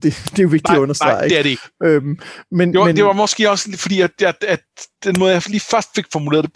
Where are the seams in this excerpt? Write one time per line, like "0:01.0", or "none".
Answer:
none

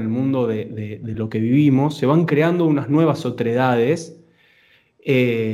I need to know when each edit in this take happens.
none

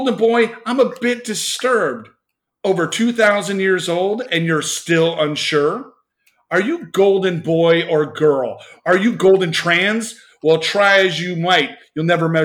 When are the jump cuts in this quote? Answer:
none

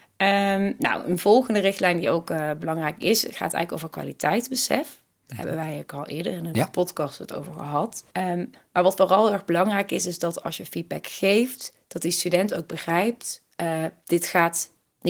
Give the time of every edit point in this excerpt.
0:06.5
0:08.1

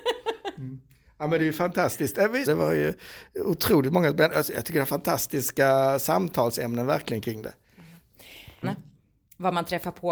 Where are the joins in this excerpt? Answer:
0:02.5
0:08.6

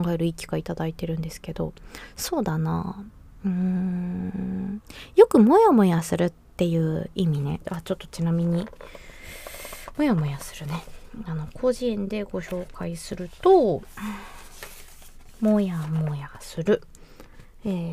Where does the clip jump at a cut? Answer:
none

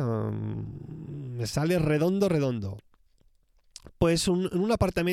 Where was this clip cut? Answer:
none

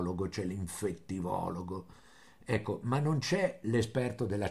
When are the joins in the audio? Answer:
none

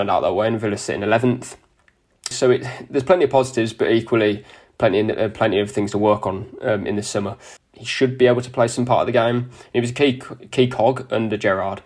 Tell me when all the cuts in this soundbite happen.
0:02.3
0:07.6

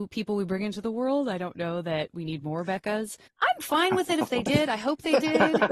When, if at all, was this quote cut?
0:03.3

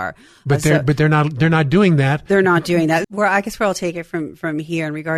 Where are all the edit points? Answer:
0:03.0

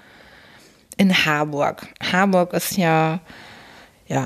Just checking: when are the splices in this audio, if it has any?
none

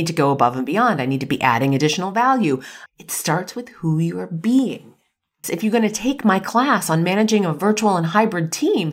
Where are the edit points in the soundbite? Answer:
0:02.9
0:05.4

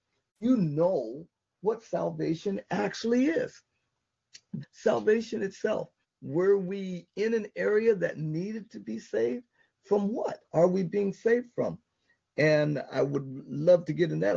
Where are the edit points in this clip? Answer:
0:04.6
0:06.0

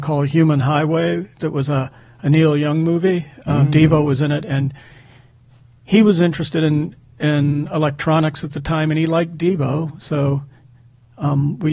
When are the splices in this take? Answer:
none

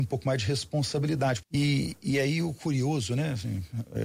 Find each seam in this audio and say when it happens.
0:01.4

